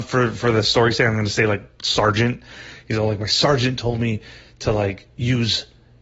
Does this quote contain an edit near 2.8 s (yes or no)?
no